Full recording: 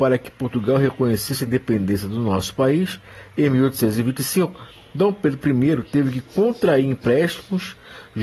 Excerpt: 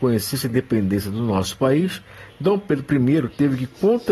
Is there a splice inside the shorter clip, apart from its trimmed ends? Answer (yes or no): yes